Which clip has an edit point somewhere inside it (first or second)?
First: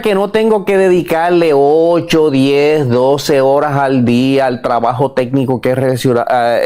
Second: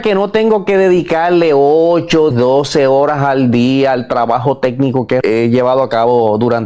second